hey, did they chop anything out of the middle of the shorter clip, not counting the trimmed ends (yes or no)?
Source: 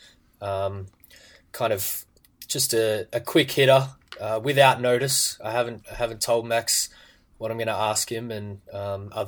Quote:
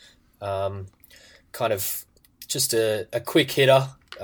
no